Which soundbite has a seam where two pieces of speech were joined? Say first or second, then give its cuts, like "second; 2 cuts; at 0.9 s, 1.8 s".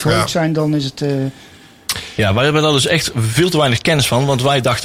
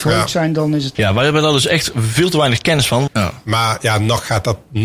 second; 2 cuts; at 0.9 s, 3.1 s